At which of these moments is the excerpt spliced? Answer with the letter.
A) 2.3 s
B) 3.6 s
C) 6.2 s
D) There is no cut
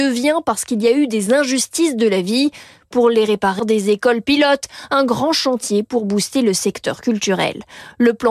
B